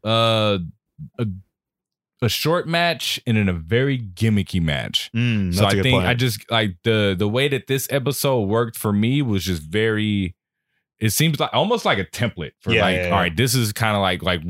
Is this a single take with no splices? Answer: yes; 0 cuts

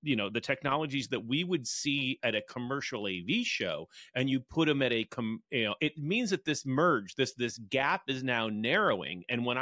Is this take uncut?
no; 1 cut; at 5.8 s

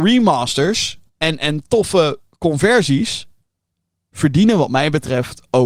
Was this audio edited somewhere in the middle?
yes; 1 cut; at 1.1 s

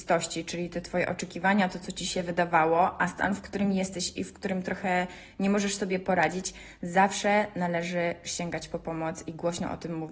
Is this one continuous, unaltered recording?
yes; 0 cuts

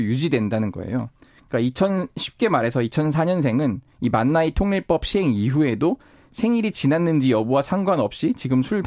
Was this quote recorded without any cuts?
yes; 0 cuts

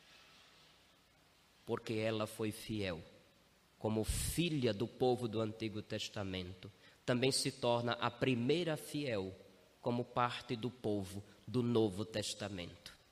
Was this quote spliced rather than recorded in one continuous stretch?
no; 0 cuts

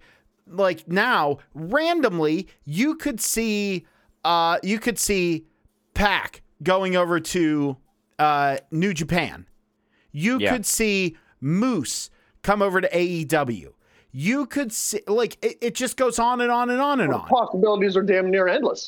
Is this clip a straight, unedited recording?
yes; 0 cuts

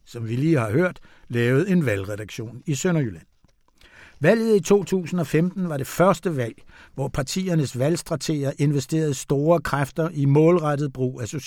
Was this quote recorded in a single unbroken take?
yes; 0 cuts

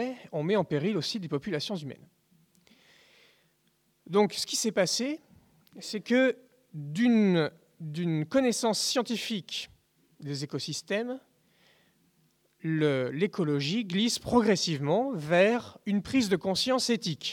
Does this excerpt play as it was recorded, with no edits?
yes; 0 cuts

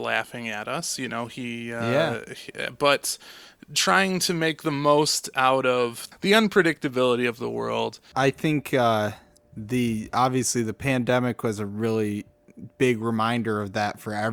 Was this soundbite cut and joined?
no; 0 cuts

